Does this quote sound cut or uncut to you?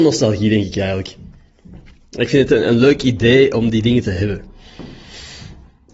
uncut